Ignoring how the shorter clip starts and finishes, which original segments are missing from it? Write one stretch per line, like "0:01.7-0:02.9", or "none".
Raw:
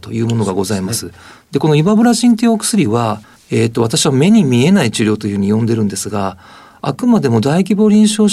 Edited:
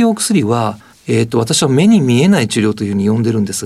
none